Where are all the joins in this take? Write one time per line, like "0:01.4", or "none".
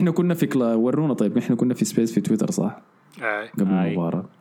none